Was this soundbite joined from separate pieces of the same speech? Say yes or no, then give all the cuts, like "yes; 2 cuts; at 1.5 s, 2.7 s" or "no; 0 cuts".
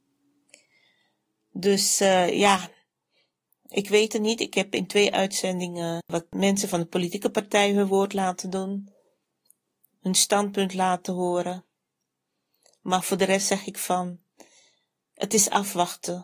yes; 1 cut; at 6.0 s